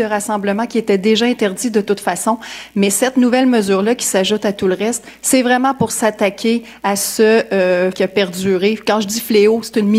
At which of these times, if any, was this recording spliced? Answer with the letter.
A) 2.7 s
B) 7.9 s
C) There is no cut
B